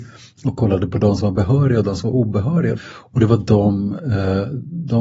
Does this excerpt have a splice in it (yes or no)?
yes